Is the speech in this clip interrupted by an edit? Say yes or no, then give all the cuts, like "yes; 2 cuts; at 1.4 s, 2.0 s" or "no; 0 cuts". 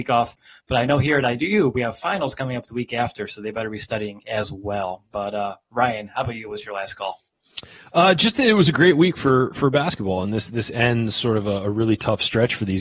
no; 0 cuts